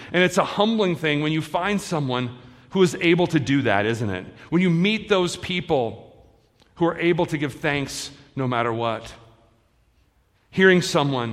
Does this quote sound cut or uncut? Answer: uncut